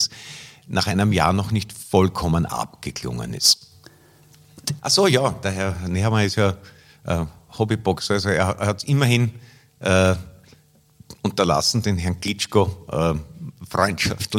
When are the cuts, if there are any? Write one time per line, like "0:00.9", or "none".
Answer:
0:04.8